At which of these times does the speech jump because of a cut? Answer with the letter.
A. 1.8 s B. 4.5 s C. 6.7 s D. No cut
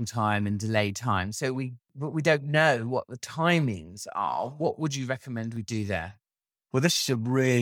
A